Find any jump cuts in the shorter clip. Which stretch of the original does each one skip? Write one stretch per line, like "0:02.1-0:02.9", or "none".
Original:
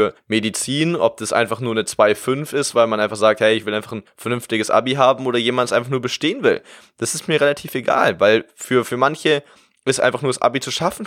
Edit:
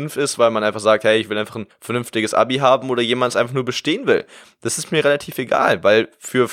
none